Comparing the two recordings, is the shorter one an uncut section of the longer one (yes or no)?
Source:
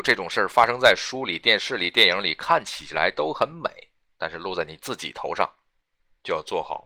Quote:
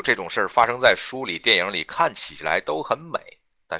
no